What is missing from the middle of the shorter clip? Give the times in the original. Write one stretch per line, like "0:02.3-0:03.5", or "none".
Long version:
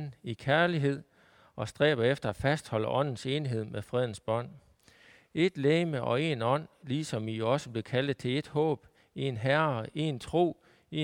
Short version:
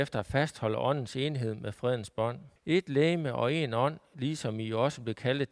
0:04.7-0:05.2